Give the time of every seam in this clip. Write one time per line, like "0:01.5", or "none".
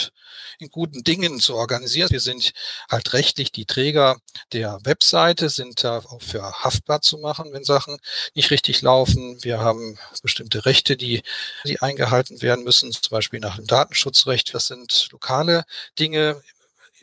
0:02.1
0:11.6
0:14.5